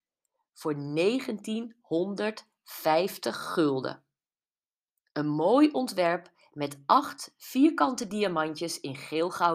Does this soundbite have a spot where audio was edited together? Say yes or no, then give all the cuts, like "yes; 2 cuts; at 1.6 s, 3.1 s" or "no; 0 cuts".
no; 0 cuts